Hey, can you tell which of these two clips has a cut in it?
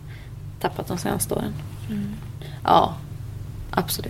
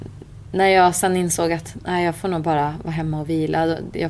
first; 1 cut; at 2.6 s

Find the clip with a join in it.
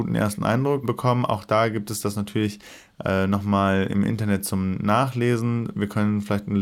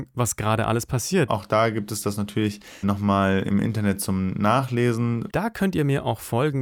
second; 3 cuts; at 1.3 s, 2.8 s, 5.3 s

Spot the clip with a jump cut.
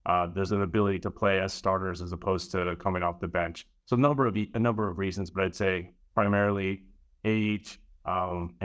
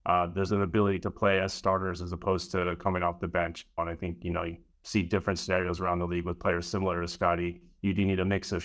second; 1 cut; at 3.8 s

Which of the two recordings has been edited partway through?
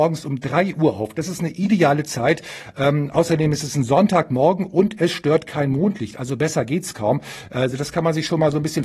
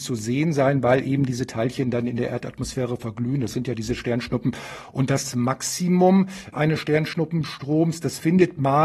second; 1 cut; at 6.5 s

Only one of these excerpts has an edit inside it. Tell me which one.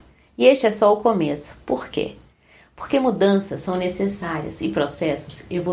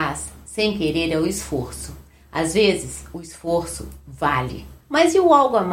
second; 1 cut; at 4.8 s

